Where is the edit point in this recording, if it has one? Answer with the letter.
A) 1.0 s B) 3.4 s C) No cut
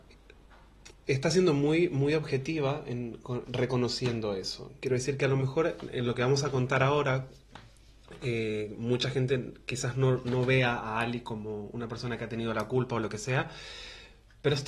B